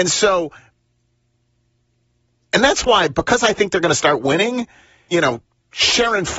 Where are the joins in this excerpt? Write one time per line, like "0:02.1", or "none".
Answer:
0:05.1